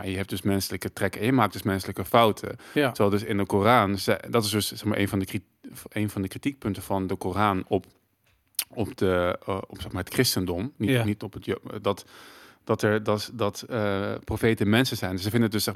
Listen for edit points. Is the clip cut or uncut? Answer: uncut